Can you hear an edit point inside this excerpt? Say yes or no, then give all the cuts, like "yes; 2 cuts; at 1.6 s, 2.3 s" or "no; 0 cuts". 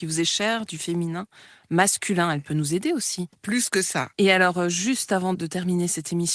yes; 2 cuts; at 4.2 s, 5.3 s